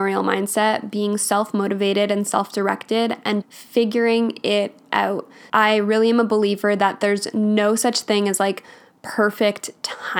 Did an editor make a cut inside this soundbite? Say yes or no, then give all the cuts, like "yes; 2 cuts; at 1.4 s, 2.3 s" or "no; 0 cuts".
yes; 2 cuts; at 3.4 s, 5.5 s